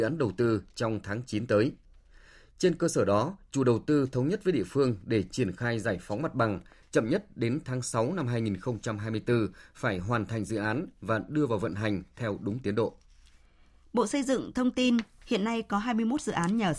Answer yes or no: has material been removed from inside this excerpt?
no